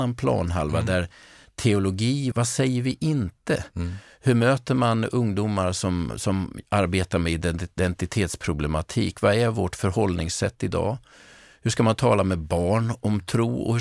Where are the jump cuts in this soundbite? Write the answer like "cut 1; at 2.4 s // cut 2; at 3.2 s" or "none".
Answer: cut 1; at 2.3 s